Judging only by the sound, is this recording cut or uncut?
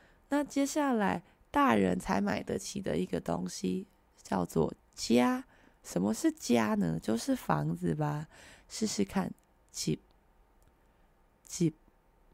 uncut